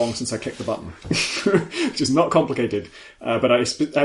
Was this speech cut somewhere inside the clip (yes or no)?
no